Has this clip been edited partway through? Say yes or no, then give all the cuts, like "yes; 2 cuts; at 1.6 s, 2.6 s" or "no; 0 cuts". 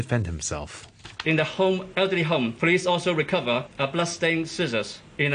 no; 0 cuts